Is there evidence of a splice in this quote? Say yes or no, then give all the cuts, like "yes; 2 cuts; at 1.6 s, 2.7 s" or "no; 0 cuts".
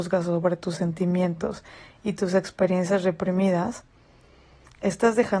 no; 0 cuts